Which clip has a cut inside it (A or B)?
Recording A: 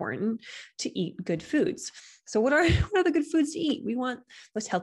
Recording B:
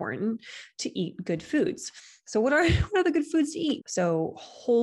B